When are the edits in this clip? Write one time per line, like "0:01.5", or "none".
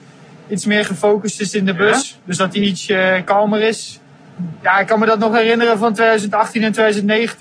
none

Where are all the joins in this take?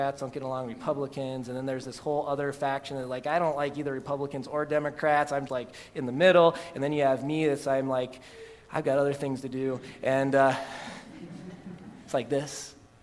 0:05.5

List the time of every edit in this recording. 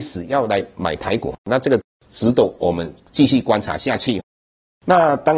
none

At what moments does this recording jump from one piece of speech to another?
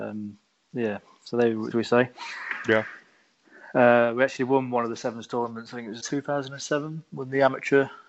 0:01.7
0:06.0

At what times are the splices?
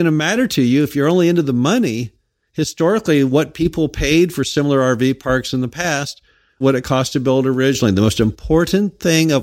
0:06.6

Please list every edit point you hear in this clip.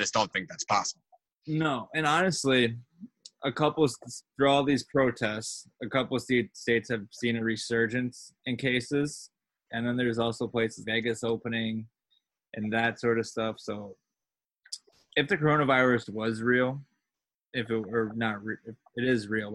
0:09.7
0:10.8

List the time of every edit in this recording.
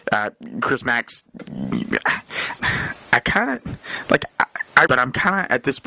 0:02.6
0:04.9

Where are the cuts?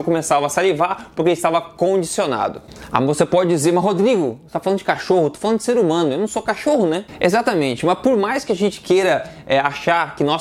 none

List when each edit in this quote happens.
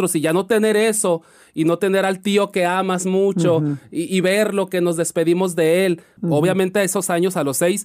0:06.2

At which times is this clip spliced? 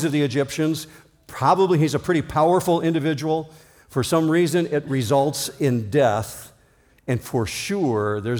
none

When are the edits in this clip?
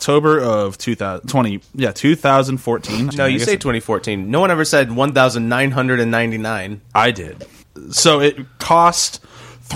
0:03.1

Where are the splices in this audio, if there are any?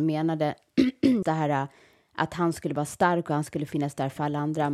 0:01.2

